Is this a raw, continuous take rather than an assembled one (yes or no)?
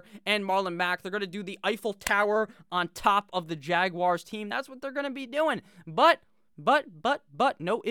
yes